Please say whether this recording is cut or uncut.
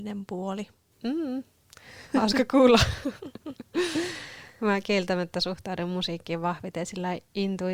cut